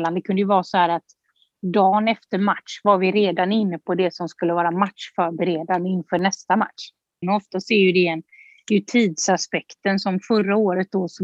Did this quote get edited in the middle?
yes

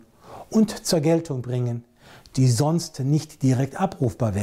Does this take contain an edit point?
no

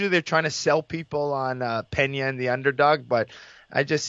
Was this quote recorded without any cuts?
yes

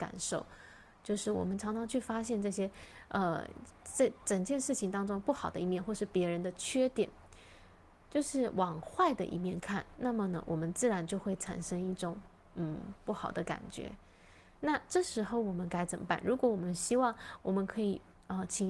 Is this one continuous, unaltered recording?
yes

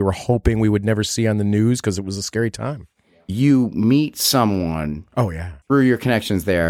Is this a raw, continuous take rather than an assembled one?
no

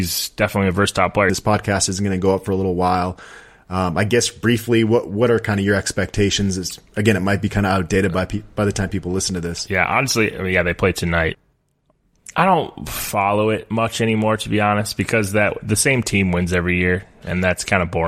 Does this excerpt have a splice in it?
yes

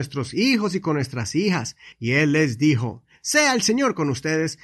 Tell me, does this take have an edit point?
yes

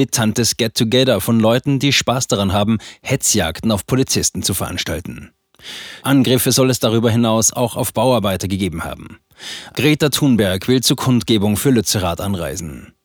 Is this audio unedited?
no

